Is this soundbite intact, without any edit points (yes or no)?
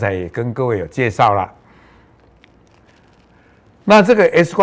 yes